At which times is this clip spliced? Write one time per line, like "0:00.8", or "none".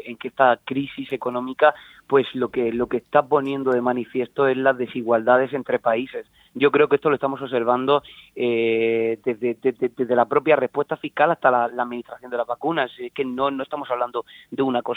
none